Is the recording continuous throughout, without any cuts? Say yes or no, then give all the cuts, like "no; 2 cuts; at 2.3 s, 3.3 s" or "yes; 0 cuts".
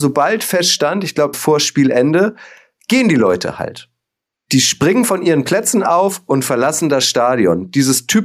no; 1 cut; at 1.3 s